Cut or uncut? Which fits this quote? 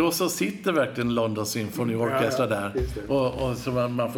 uncut